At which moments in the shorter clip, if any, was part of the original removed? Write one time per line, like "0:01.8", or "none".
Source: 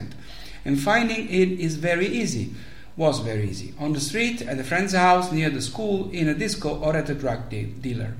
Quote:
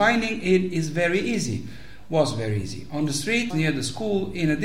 0:03.5

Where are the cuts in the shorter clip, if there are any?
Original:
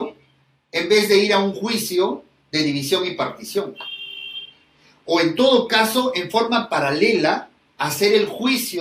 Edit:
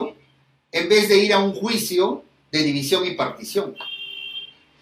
none

